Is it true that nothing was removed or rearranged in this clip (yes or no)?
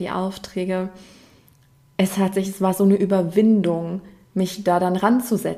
yes